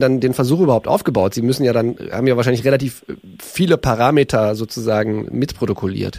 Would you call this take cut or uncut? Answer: uncut